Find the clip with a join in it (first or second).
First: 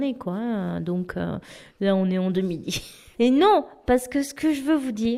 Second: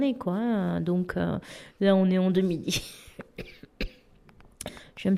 first